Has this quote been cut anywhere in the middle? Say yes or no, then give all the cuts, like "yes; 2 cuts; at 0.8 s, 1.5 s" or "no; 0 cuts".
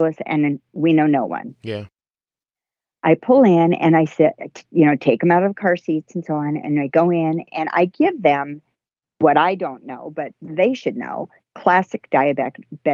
no; 0 cuts